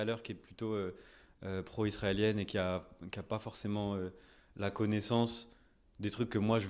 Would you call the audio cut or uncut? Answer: uncut